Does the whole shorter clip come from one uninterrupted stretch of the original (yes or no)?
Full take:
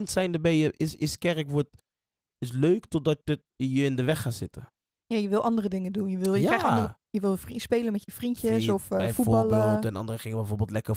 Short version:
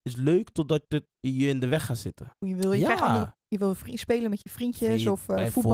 no